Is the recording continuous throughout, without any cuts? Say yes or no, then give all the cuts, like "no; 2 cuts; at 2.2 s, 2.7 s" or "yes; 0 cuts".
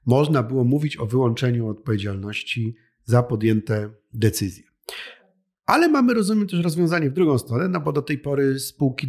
yes; 0 cuts